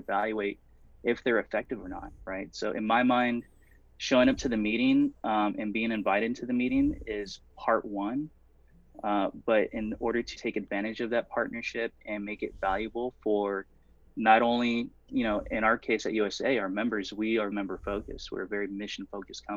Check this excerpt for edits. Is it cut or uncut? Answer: cut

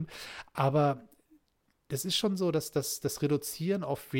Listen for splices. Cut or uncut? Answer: uncut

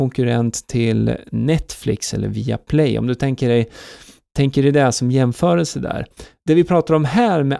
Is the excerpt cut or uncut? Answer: uncut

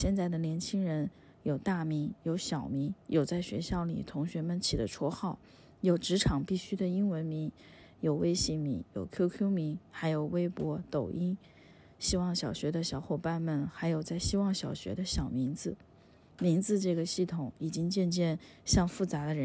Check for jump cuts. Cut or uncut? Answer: uncut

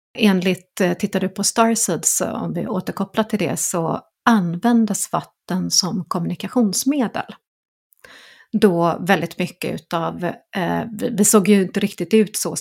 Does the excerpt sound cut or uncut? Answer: uncut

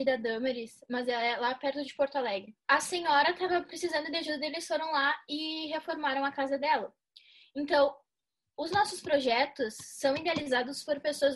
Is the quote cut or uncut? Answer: uncut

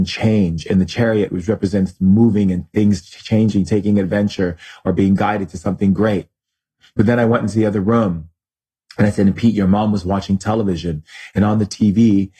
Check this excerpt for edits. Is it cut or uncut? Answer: uncut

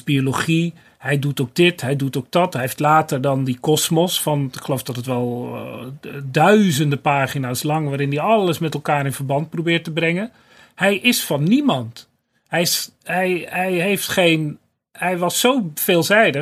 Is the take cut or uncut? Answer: uncut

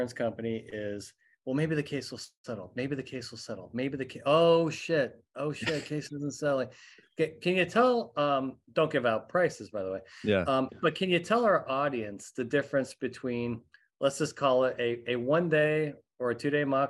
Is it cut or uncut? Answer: uncut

